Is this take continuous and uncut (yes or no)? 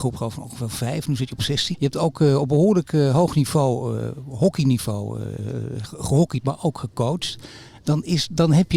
no